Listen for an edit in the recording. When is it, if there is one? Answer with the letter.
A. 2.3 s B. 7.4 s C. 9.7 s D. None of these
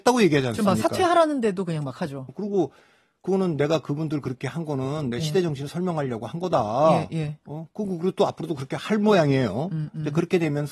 A